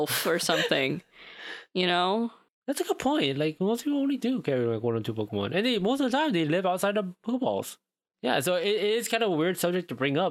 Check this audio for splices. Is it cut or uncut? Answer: uncut